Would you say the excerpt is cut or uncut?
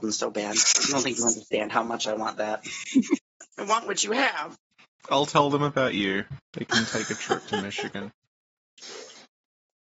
uncut